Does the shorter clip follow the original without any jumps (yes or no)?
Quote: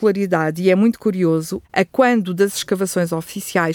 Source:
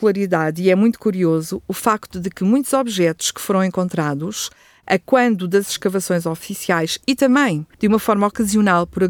no